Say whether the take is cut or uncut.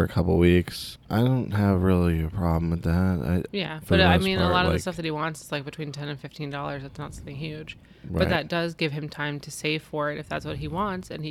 cut